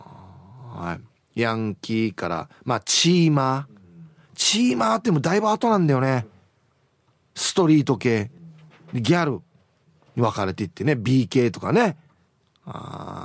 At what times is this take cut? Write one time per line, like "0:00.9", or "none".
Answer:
none